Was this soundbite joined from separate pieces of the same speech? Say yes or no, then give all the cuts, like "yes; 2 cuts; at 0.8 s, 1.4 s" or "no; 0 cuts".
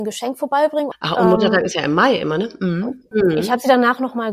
yes; 2 cuts; at 0.9 s, 3.1 s